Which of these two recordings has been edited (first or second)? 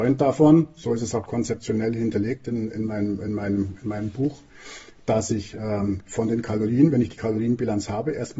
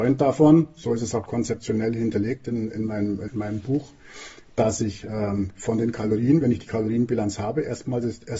second